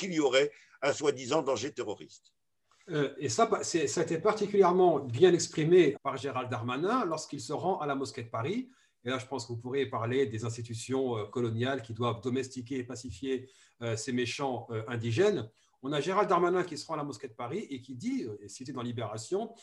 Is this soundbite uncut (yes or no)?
no